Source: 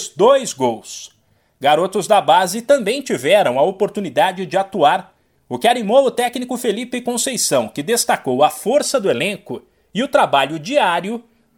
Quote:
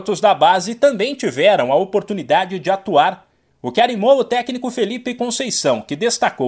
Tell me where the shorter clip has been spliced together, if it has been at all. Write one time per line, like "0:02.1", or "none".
none